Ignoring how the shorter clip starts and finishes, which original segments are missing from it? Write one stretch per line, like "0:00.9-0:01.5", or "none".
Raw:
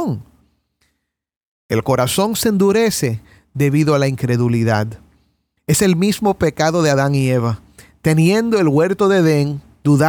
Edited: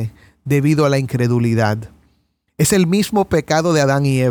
none